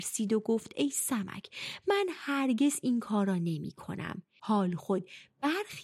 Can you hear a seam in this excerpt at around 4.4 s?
yes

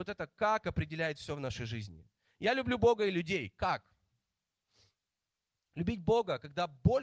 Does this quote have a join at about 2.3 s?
no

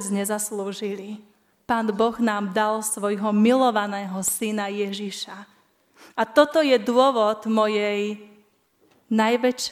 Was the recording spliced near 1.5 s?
yes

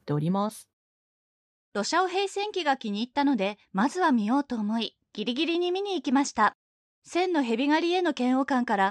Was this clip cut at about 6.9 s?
yes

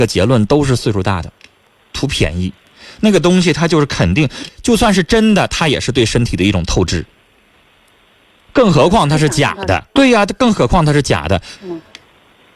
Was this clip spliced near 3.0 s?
no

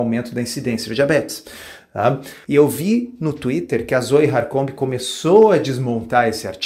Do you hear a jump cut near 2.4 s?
yes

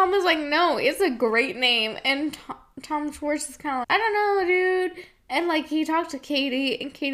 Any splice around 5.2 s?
no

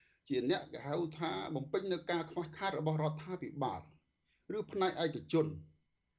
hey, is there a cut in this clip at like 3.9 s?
no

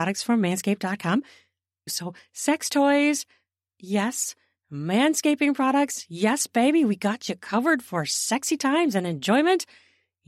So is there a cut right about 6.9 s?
no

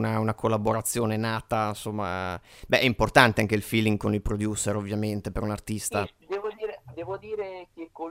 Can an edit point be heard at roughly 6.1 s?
no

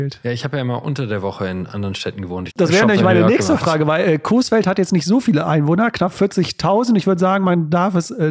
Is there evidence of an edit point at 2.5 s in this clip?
yes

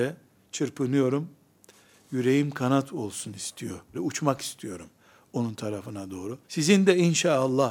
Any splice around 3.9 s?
yes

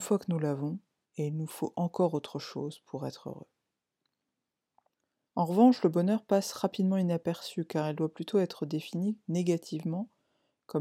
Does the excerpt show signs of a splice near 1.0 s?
yes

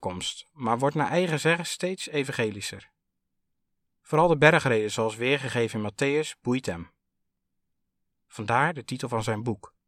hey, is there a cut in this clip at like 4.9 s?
no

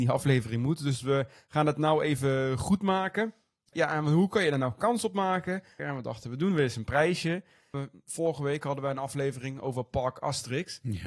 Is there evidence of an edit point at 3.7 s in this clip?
yes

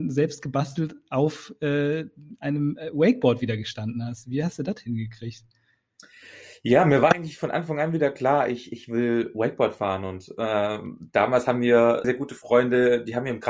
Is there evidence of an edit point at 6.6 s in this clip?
no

